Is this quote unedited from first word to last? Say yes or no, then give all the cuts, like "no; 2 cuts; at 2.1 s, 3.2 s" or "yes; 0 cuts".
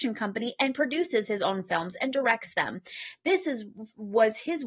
yes; 0 cuts